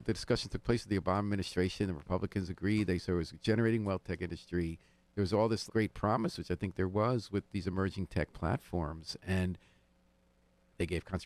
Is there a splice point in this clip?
yes; 1 cut; at 5.7 s

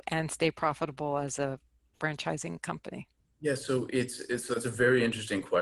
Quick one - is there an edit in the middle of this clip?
no; 0 cuts

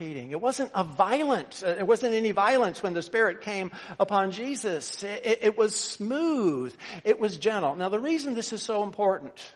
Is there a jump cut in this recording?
no; 0 cuts

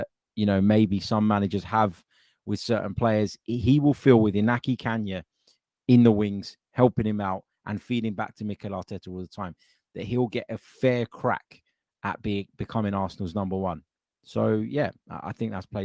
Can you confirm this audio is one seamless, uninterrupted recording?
yes; 0 cuts

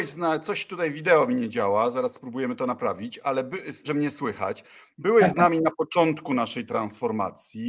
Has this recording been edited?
yes; 1 cut; at 3.8 s

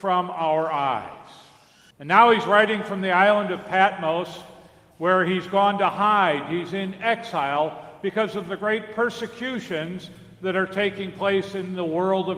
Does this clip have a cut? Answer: yes; 1 cut; at 1.9 s

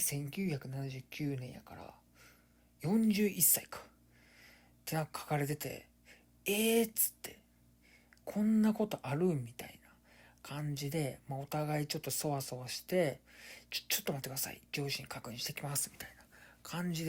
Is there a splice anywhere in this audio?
no; 0 cuts

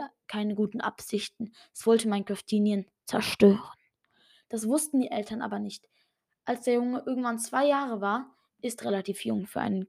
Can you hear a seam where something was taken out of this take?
no; 0 cuts

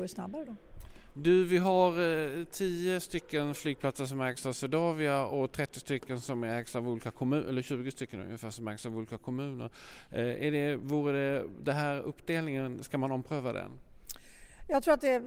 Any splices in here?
no; 0 cuts

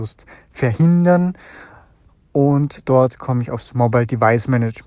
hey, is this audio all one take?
yes; 0 cuts

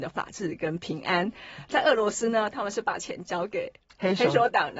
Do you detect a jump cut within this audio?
no; 0 cuts

